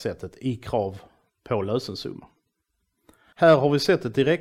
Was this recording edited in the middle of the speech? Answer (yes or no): yes